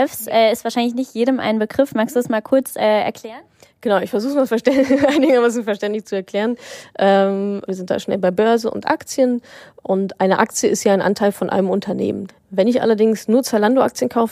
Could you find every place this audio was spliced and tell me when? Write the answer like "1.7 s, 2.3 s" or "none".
7.7 s, 12.3 s